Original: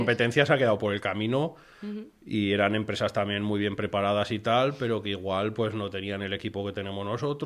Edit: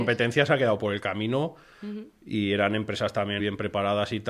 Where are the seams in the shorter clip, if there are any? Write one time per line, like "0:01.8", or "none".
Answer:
0:03.4

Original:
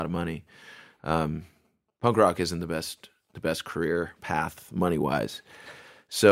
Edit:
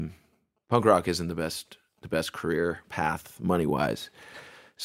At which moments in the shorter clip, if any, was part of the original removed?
none

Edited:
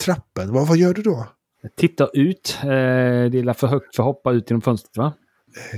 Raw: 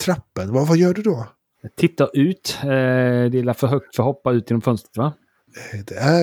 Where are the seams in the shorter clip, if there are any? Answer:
none

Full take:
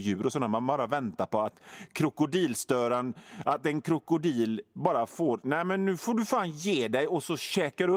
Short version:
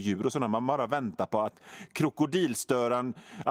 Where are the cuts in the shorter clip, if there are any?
none

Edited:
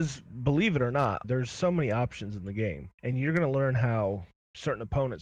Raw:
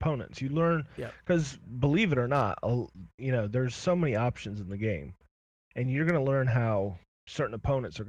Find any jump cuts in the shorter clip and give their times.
0:01.2
0:02.9

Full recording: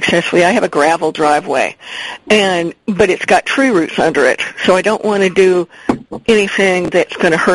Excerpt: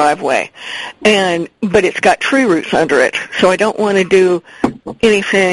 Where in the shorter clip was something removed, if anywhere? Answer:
none

